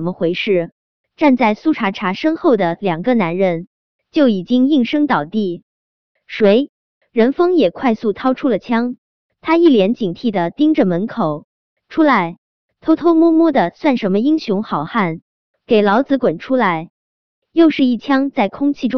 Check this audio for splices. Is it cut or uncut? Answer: uncut